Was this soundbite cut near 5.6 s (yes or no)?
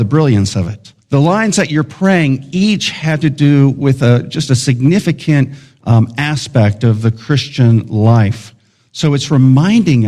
no